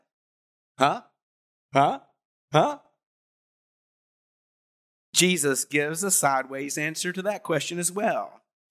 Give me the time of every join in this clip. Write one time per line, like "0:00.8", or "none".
none

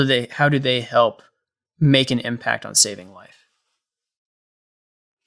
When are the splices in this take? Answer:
0:01.6

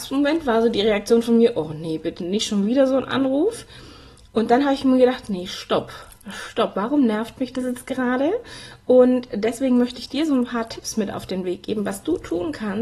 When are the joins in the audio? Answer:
none

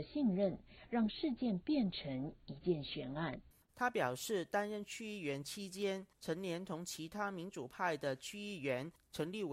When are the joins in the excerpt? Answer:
0:03.5

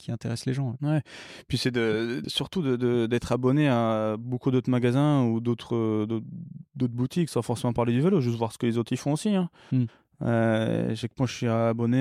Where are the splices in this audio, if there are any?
0:02.2

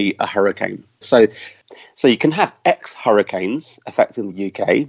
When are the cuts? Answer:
0:01.0

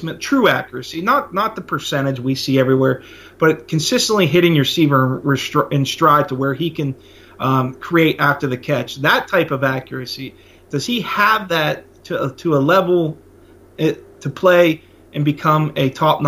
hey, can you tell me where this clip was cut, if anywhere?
none

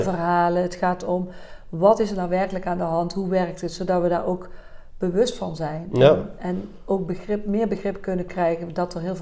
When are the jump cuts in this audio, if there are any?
none

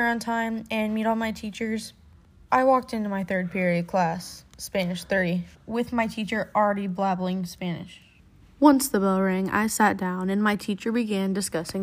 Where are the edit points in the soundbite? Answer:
0:05.5

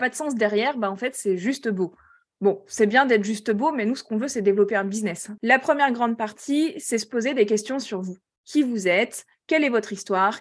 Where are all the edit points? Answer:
0:05.4

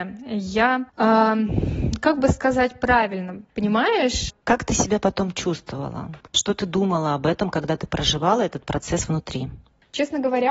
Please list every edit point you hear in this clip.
0:04.4

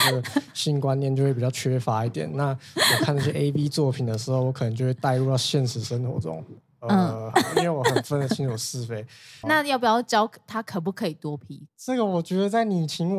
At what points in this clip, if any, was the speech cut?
0:07.3
0:09.4
0:11.7

